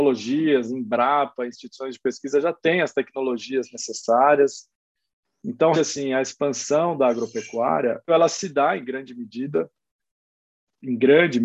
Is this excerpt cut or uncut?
cut